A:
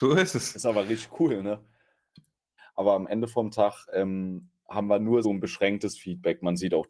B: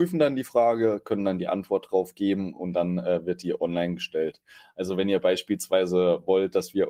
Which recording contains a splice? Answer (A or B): A